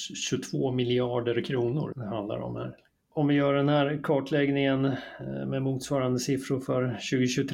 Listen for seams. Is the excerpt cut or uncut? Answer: cut